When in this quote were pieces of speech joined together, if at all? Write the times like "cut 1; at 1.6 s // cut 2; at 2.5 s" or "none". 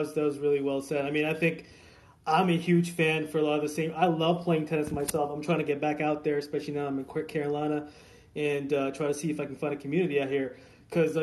none